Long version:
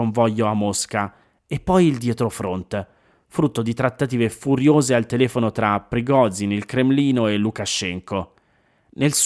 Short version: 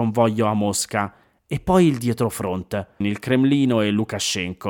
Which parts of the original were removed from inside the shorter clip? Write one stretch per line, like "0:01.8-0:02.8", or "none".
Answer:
0:03.0-0:06.5